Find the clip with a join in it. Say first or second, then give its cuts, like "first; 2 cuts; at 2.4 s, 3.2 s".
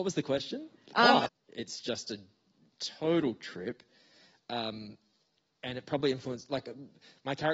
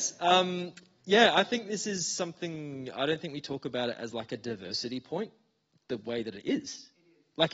first; 1 cut; at 1.3 s